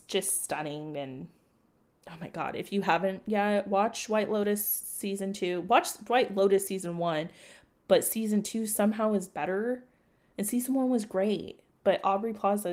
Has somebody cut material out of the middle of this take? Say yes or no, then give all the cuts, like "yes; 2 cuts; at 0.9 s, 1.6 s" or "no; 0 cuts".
no; 0 cuts